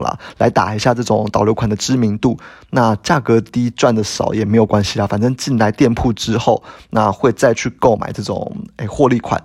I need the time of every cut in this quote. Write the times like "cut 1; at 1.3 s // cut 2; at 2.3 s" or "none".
none